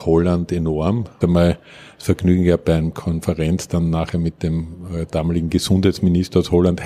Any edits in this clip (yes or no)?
yes